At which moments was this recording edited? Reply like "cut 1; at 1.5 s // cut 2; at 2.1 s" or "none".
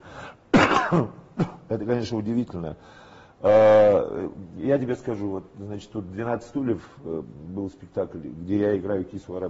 none